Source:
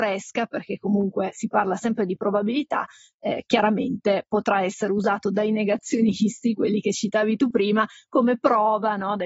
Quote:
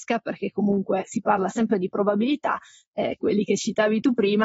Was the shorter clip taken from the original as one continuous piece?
no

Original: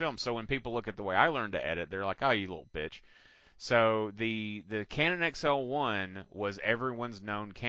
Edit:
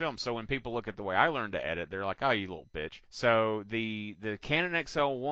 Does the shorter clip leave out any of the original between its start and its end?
yes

